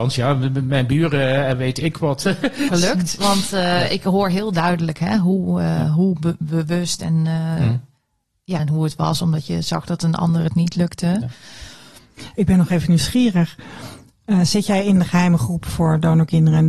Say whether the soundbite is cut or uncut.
cut